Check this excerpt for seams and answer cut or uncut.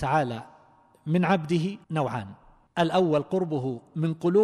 cut